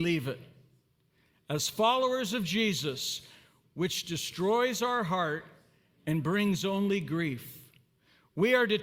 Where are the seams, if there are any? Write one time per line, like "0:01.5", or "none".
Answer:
0:03.7